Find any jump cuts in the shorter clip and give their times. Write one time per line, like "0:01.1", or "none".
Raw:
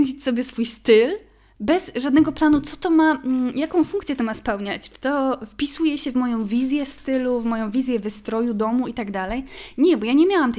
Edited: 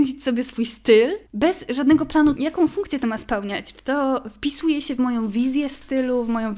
0:01.3
0:02.4